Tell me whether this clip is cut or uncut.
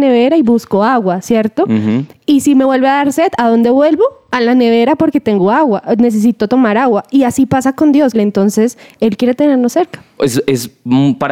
cut